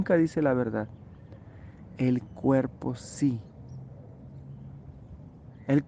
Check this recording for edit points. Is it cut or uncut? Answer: uncut